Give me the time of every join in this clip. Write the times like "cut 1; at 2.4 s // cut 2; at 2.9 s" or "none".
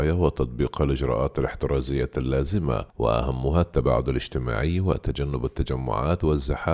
cut 1; at 2.9 s